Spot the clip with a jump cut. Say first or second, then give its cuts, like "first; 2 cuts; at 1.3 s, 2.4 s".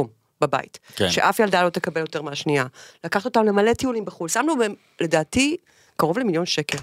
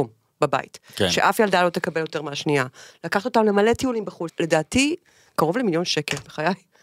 second; 1 cut; at 4.3 s